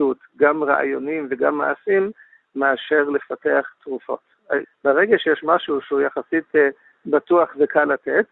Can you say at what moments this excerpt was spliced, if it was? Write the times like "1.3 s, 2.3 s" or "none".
4.6 s